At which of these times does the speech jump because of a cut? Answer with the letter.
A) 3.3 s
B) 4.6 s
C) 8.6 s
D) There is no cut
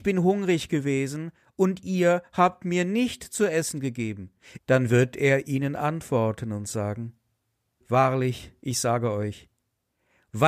B